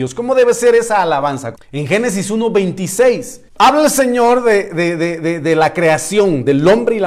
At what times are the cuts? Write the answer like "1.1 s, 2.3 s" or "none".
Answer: 1.5 s, 3.5 s